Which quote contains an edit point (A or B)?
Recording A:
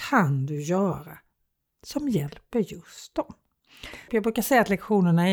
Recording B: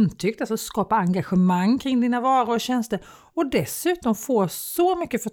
A